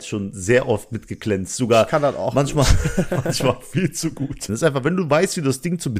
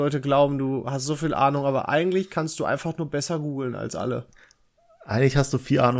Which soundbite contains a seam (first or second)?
first